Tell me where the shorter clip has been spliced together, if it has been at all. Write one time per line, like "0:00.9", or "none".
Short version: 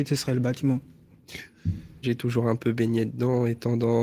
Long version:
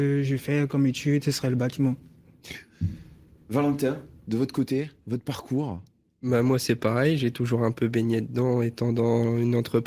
0:02.0